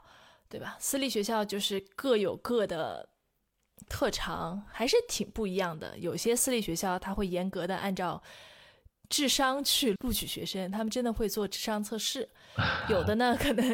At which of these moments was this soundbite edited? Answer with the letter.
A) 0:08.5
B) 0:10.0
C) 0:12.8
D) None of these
B